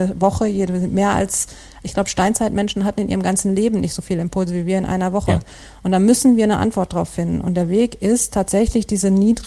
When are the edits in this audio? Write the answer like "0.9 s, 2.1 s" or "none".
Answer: none